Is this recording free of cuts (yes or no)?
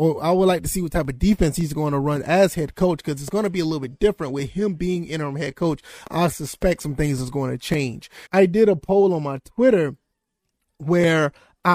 no